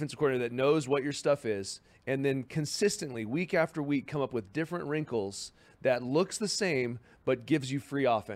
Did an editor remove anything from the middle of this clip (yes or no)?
no